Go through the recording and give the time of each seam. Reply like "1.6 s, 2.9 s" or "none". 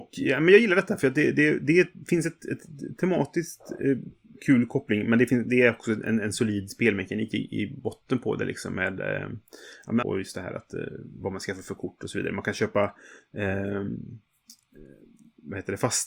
10.0 s